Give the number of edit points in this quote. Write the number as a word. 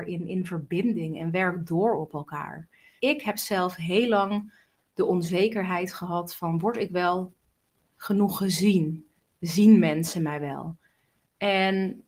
one